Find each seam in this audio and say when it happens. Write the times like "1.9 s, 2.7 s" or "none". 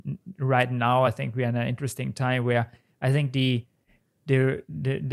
none